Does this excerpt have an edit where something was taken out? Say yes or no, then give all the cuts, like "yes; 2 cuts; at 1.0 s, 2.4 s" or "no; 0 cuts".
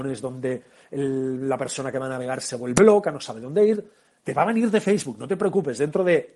yes; 1 cut; at 4.2 s